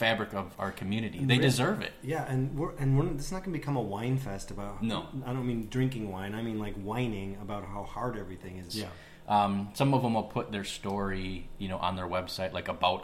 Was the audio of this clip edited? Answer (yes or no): yes